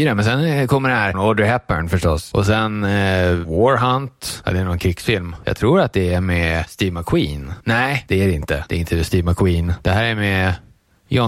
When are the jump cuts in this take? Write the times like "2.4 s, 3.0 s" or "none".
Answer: 1.1 s